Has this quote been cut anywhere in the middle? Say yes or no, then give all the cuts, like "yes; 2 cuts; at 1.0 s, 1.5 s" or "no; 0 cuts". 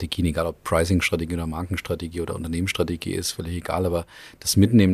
no; 0 cuts